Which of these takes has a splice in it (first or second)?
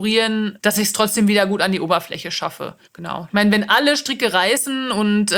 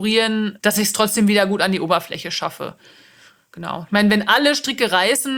first